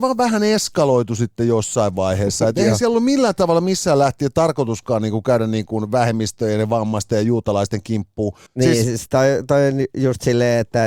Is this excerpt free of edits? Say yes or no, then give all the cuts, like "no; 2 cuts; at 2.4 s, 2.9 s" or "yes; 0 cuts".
no; 1 cut; at 8.5 s